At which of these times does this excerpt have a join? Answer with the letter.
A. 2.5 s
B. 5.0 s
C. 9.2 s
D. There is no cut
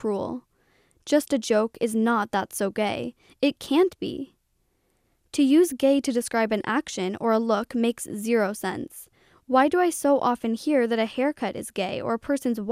D